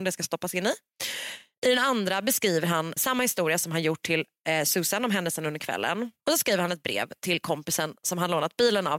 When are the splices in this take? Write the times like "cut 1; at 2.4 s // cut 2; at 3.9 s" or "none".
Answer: cut 1; at 3.0 s // cut 2; at 6.2 s

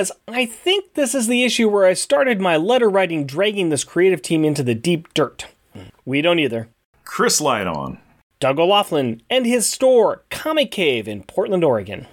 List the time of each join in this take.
cut 1; at 5.9 s

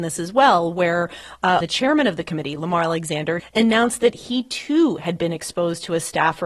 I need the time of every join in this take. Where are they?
cut 1; at 1.6 s // cut 2; at 3.4 s

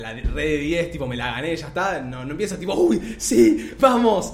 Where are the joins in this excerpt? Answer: none

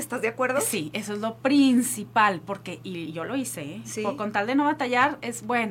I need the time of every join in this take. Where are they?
none

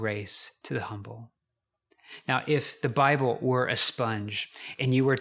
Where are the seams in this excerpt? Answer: none

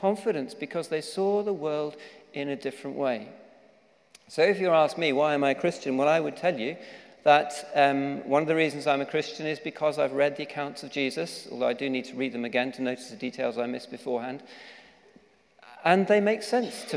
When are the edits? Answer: none

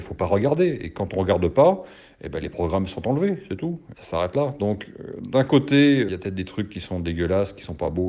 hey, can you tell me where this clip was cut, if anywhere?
cut 1; at 3.9 s // cut 2; at 6.1 s

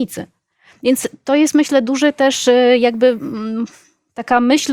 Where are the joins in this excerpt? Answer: none

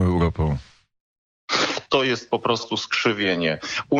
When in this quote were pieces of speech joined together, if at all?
cut 1; at 1.9 s

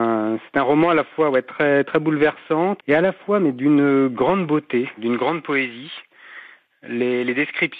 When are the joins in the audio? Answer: cut 1; at 2.8 s // cut 2; at 5.0 s

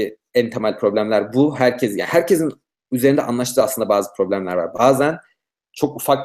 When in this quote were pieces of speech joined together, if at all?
none

